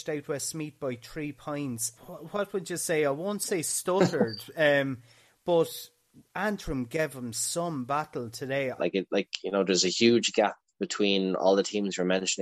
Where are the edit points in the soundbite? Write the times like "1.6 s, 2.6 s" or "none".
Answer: 2.0 s, 8.8 s

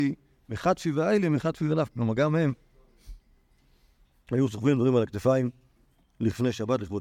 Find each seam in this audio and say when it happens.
none

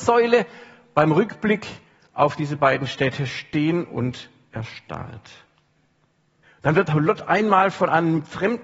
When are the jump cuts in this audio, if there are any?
6.4 s

